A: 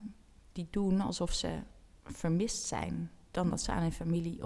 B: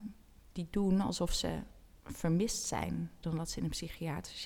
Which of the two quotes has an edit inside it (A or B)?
B